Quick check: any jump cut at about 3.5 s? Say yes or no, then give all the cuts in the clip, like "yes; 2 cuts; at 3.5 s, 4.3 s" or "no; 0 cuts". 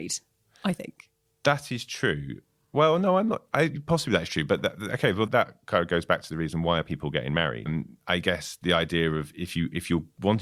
no; 2 cuts; at 5.3 s, 7.7 s